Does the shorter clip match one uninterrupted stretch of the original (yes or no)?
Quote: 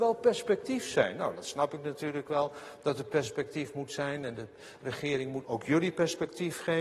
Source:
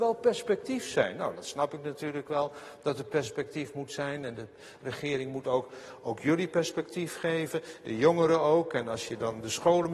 no